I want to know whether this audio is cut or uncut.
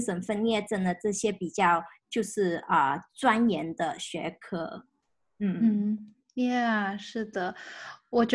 uncut